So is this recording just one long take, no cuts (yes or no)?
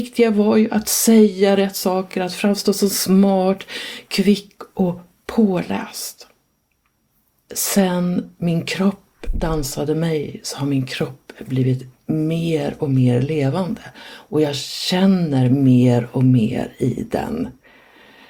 yes